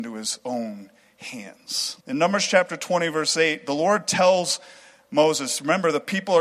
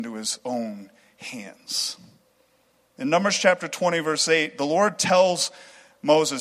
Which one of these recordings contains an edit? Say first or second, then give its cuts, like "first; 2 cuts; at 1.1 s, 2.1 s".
first; 1 cut; at 2.0 s